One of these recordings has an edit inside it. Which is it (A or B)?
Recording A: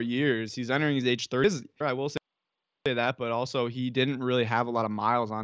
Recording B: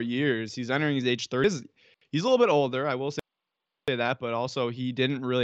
A